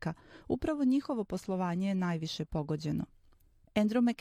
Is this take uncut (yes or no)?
yes